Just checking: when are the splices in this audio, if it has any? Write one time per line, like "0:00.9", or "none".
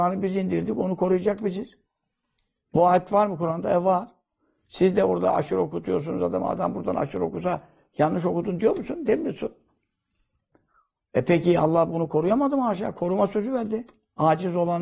none